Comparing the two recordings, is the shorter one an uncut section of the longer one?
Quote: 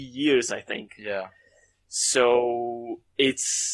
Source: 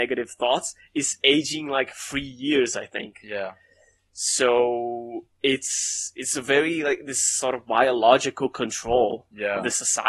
yes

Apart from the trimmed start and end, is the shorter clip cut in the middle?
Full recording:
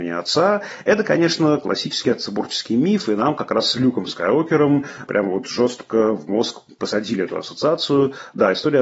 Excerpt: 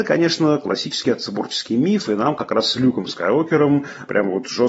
no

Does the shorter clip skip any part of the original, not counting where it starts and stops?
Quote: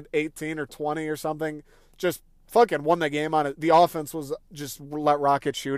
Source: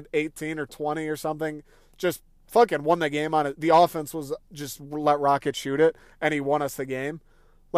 no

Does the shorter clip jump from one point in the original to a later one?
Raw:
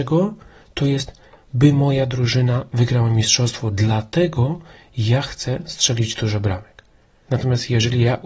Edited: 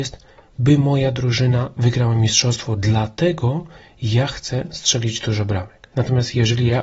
yes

